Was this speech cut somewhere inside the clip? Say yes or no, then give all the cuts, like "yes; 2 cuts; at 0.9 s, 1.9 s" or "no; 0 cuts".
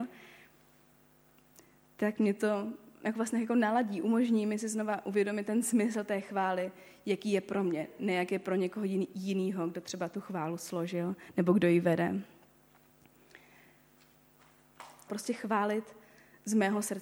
yes; 1 cut; at 15.1 s